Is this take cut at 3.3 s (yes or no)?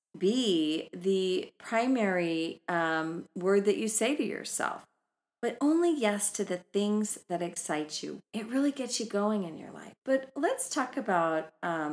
no